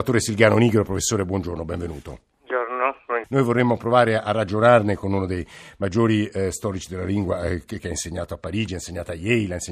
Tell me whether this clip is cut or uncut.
cut